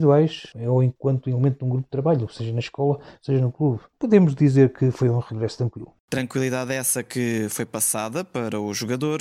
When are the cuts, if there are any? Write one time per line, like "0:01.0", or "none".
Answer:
none